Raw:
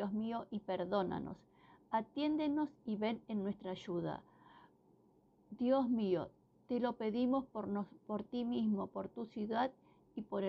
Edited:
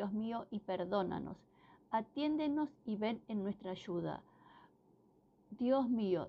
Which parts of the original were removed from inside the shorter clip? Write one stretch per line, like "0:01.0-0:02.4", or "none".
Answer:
none

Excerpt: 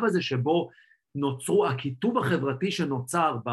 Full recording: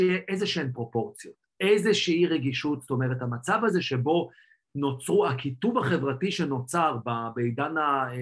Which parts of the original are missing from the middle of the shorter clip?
none

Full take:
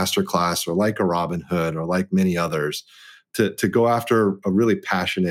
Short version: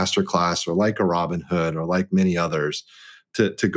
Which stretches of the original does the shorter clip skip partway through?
none

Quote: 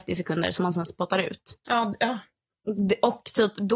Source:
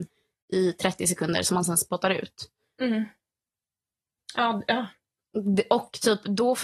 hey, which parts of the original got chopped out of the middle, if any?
0:02.6-0:04.3

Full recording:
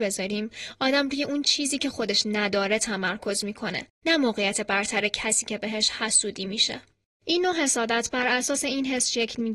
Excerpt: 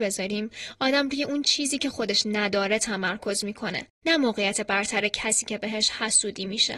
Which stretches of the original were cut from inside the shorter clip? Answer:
none

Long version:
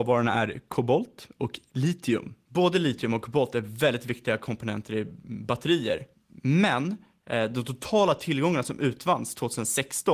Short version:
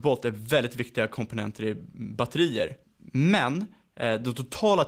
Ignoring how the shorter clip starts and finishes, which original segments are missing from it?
none

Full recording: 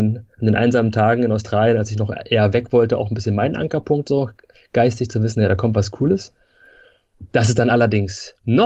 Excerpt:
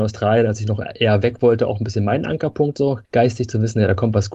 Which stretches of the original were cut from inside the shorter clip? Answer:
0:04.4-0:04.7

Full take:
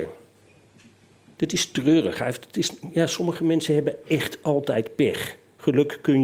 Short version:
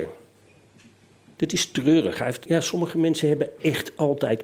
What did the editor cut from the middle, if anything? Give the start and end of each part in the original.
0:02.5-0:02.9

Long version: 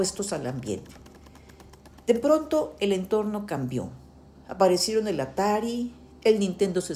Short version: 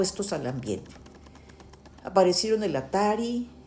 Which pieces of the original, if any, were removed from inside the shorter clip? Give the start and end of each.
0:02.0-0:04.4

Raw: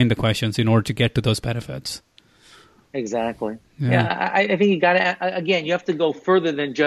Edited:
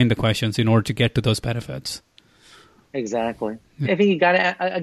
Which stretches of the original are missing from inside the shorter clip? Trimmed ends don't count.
0:03.8-0:04.5

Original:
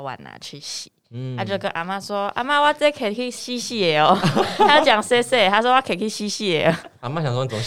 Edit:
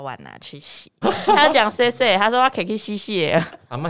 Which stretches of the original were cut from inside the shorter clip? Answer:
0:01.0-0:04.3

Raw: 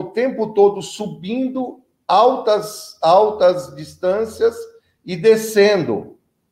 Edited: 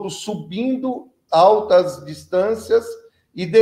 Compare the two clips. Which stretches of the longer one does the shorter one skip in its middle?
0:02.0-0:03.0

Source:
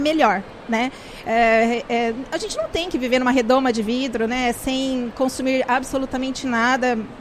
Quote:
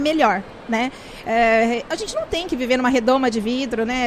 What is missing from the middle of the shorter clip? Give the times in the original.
0:01.9-0:02.3

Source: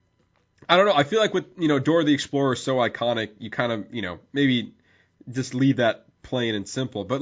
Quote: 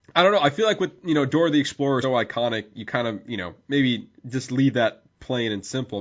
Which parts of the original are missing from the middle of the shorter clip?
0:02.6-0:02.7
0:04.8-0:05.2

